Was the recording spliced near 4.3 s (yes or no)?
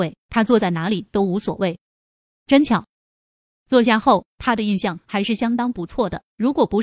yes